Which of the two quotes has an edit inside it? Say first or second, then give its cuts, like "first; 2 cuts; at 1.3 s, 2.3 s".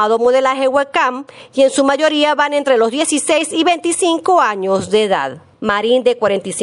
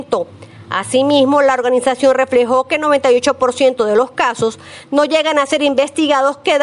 first; 1 cut; at 5.5 s